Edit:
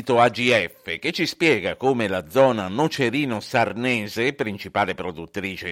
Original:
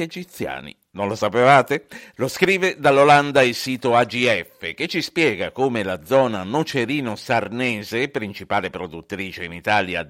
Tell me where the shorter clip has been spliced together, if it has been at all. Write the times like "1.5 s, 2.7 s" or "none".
none